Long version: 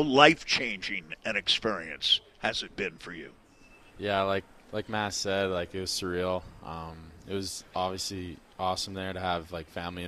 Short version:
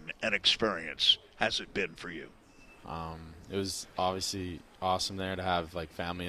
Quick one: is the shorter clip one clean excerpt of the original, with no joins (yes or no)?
no